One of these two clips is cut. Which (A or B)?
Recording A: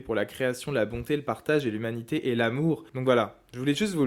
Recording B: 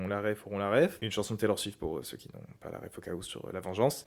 A